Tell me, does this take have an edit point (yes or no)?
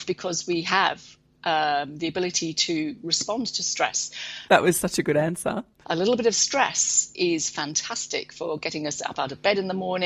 yes